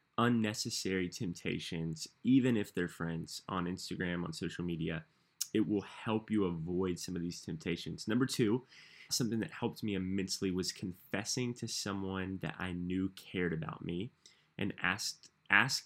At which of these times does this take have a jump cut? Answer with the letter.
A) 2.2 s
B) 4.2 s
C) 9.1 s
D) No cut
C